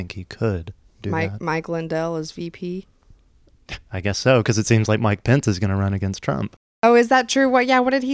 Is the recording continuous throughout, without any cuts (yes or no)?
yes